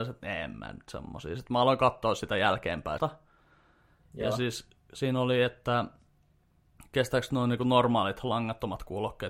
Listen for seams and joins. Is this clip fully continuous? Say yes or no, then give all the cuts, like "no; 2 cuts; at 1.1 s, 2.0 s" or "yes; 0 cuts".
no; 1 cut; at 3.0 s